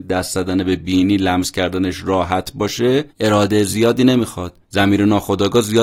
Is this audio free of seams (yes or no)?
no